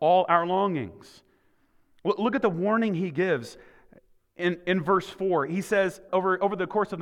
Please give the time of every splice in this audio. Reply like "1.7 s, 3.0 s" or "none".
6.1 s